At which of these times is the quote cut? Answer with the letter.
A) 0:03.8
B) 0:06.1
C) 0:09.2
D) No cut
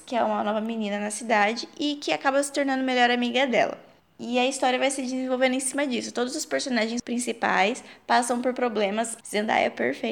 C